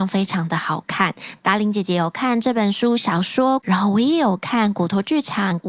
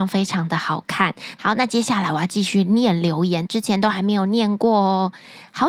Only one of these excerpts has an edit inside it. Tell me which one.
second; 2 cuts; at 1.4 s, 3.5 s

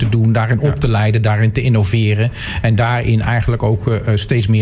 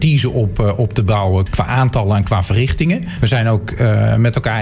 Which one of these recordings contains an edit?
second; 2 cuts; at 1.5 s, 3.2 s

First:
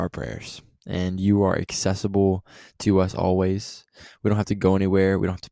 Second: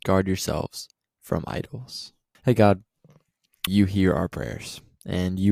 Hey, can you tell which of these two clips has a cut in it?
second; 2 cuts; at 2.3 s, 3.7 s

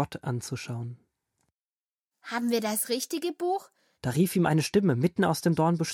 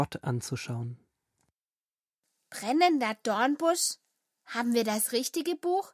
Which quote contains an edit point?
first; 2 cuts; at 2.1 s, 3.9 s

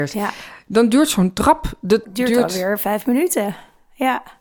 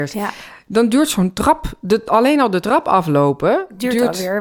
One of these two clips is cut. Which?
first; 1 cut; at 2.0 s

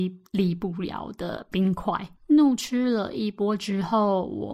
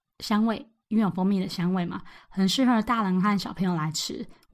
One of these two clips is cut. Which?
first; 1 cut; at 2.2 s

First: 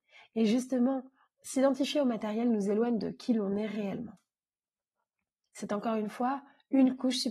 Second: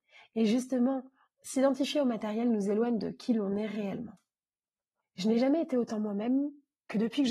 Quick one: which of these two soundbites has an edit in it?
second; 1 cut; at 5.0 s

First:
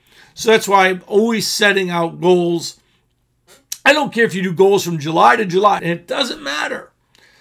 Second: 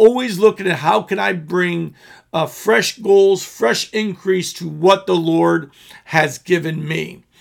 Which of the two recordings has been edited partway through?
first; 1 cut; at 5.8 s

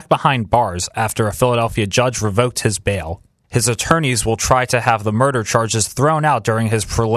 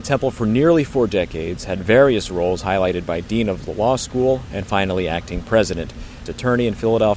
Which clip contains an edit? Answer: second; 2 cuts; at 4.4 s, 6.3 s

